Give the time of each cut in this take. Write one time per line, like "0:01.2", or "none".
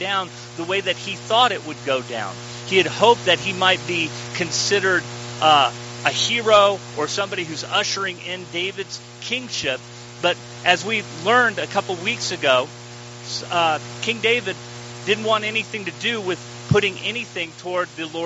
none